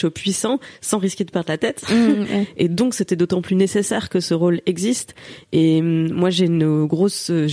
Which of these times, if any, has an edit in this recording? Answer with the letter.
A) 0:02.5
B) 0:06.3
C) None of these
C